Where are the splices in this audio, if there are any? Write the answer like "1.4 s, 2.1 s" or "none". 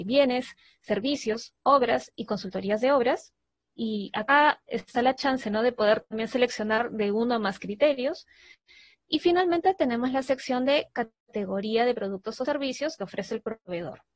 none